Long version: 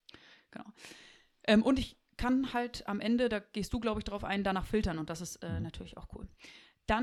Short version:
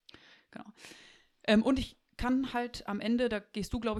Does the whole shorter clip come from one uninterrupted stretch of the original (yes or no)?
yes